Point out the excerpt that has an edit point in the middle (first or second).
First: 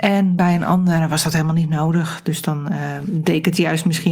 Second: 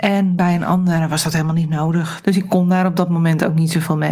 second